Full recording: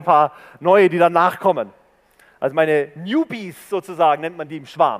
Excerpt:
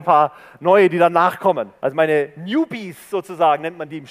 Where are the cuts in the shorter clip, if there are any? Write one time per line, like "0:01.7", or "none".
0:01.8